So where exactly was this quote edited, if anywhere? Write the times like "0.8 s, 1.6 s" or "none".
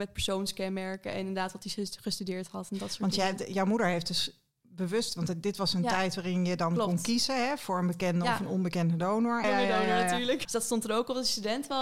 9.4 s, 10.4 s